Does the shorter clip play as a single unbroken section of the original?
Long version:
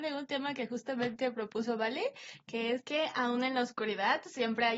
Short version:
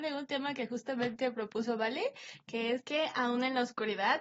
yes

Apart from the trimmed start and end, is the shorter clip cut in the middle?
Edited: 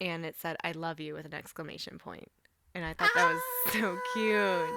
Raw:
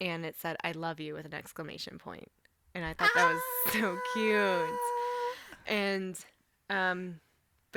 no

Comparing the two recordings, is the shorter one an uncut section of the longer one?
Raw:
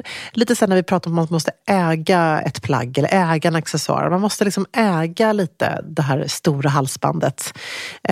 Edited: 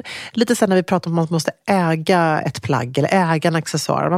yes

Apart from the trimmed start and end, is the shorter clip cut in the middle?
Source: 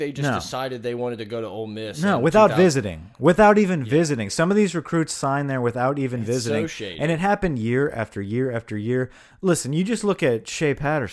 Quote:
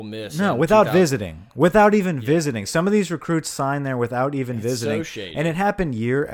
no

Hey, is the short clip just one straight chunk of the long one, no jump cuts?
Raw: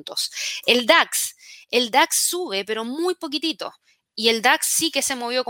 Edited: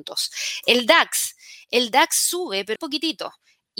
no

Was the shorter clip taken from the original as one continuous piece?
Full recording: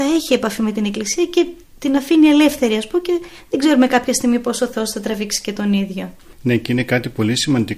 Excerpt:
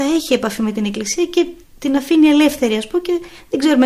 yes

